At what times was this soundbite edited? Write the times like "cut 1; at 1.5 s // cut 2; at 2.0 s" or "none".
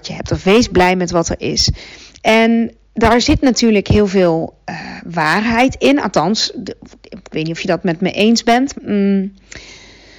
cut 1; at 8.7 s